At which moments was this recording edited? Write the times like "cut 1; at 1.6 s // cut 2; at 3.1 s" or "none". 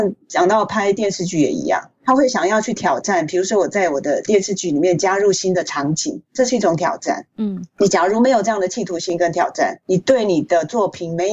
none